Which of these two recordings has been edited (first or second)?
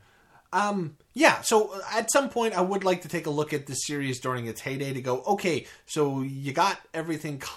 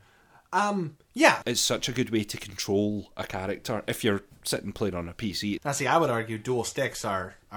second